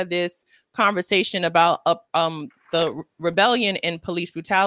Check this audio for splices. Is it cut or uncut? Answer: uncut